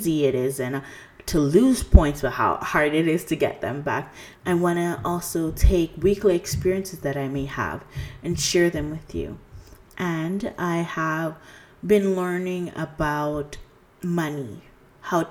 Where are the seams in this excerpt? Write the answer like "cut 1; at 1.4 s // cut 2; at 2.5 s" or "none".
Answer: cut 1; at 4.3 s // cut 2; at 9.9 s